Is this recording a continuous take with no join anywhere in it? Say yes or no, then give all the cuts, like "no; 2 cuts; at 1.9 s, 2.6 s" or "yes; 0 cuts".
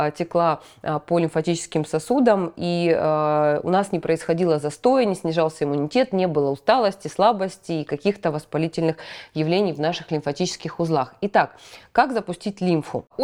yes; 0 cuts